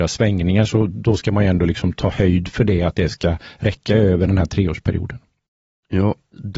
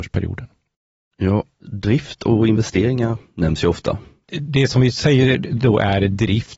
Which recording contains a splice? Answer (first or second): second